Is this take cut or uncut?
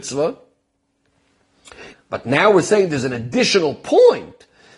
cut